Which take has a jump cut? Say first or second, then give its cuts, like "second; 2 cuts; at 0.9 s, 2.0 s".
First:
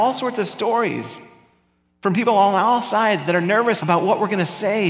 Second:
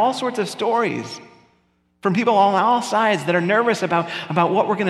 first; 1 cut; at 3.8 s